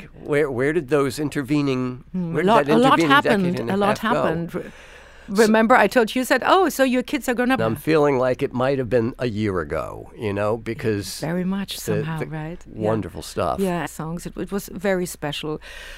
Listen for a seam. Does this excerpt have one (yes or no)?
yes